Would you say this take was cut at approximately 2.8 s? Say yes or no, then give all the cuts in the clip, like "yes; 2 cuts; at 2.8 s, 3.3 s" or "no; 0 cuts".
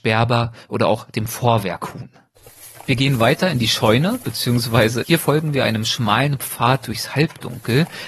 no; 1 cut; at 5.0 s